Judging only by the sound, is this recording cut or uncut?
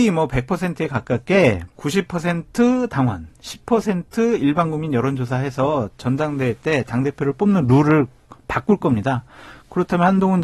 cut